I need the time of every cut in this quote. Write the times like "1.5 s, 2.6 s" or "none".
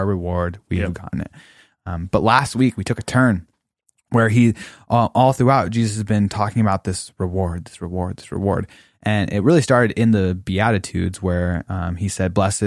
none

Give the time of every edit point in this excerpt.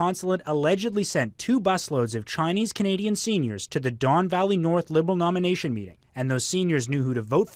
6.0 s

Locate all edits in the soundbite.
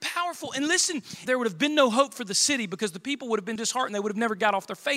1.3 s, 3.6 s

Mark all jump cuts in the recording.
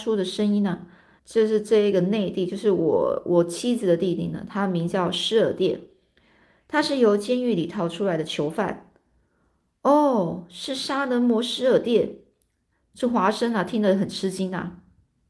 1.2 s

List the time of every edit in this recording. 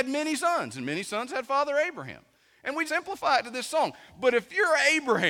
2.9 s

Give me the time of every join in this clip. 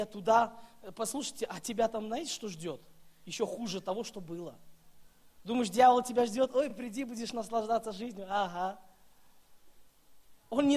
none

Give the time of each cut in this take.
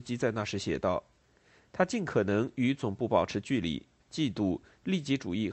4.0 s

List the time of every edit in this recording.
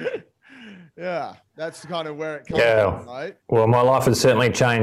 3.4 s

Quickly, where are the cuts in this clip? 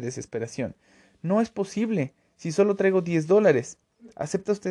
none

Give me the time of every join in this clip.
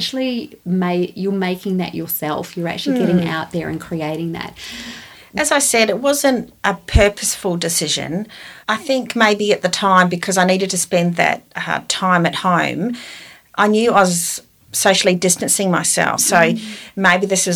8.6 s, 16.2 s

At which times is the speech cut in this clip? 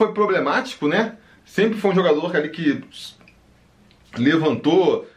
none

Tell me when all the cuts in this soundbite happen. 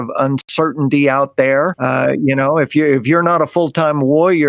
1.7 s

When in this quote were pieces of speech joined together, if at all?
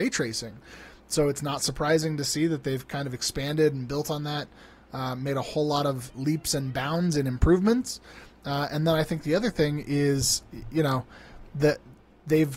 none

